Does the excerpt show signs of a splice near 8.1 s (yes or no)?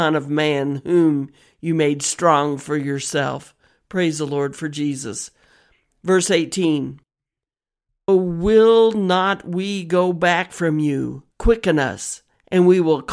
yes